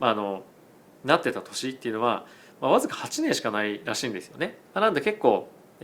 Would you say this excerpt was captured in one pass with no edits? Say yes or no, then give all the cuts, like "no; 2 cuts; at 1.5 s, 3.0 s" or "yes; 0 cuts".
no; 1 cut; at 4.7 s